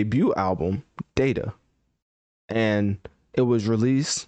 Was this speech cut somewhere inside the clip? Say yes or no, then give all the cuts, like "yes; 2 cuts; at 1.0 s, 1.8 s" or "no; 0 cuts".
no; 0 cuts